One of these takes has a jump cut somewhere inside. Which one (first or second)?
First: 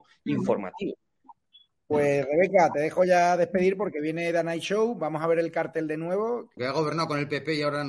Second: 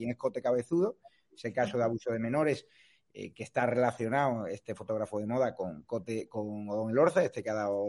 first